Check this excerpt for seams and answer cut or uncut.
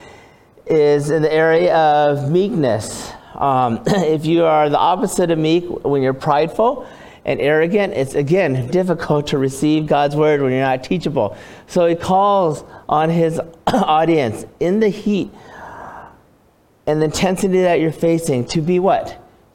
cut